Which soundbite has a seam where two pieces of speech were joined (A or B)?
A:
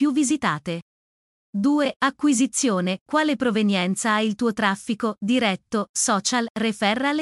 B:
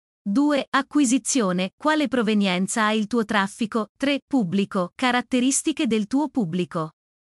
B